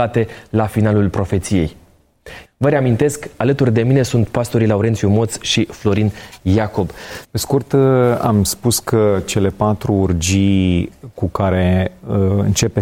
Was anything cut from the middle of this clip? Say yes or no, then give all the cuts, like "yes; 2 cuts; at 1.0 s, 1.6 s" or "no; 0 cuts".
yes; 2 cuts; at 2.4 s, 7.2 s